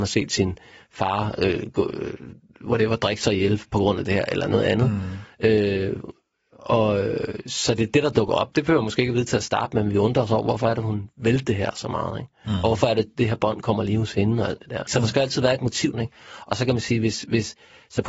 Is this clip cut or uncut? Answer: cut